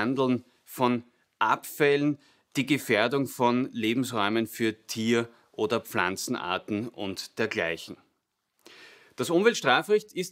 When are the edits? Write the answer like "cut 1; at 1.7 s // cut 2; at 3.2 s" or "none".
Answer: none